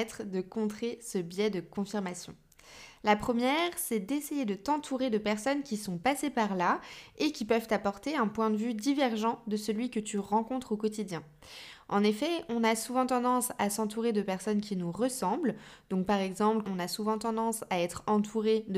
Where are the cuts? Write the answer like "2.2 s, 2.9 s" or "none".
16.6 s